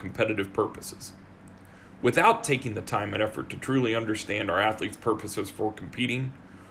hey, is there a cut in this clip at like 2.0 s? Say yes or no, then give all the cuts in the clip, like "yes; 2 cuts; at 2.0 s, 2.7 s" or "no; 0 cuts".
no; 0 cuts